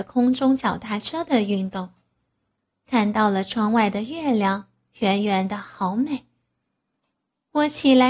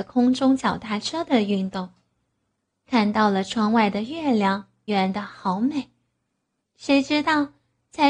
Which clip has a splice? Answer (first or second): second